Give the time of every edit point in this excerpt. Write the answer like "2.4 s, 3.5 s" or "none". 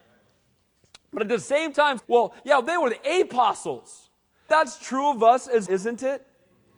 2.0 s, 4.5 s, 5.7 s